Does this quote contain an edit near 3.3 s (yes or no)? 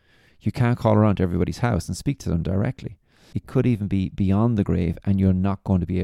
yes